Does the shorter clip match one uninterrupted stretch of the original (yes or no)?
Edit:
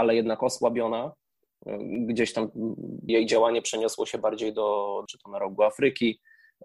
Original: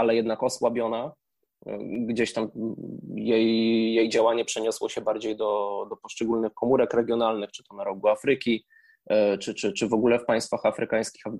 no